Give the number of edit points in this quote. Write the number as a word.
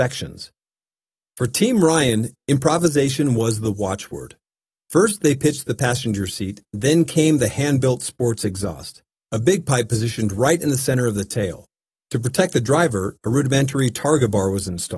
zero